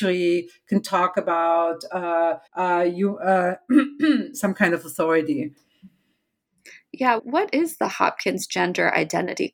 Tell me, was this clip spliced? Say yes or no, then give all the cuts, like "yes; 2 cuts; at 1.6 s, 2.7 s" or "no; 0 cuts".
yes; 3 cuts; at 2.5 s, 4.3 s, 7.2 s